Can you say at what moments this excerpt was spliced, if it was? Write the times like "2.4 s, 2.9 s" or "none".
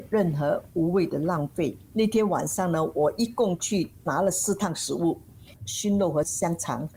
1.8 s, 5.6 s

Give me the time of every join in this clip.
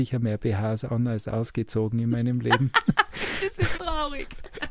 3.7 s

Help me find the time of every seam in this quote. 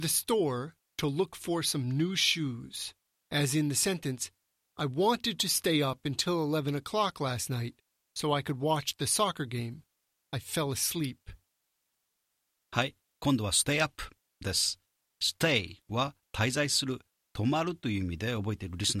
3.2 s, 10.2 s

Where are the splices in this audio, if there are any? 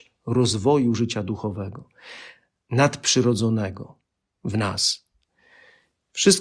none

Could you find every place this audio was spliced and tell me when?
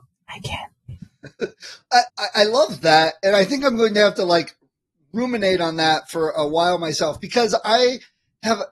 2.1 s

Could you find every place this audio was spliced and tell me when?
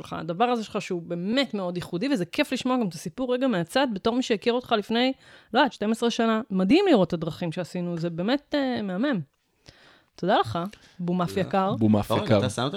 5.7 s

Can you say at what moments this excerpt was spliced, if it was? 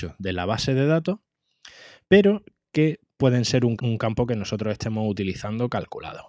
3.8 s

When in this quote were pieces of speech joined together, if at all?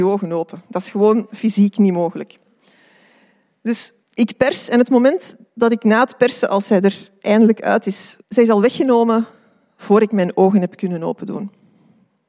4.0 s, 8.2 s

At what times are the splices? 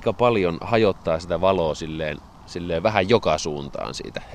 none

